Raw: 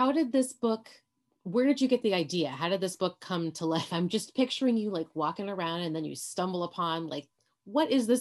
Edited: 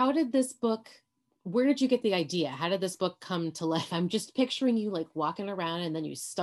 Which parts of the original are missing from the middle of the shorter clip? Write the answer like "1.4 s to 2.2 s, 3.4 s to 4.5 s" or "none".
none